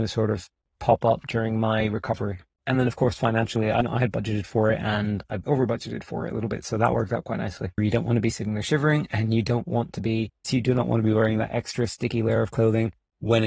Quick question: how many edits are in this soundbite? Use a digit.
3